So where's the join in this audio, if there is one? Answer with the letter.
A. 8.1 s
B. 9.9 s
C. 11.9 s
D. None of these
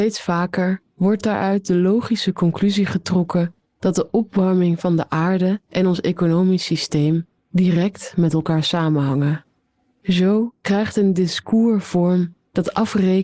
B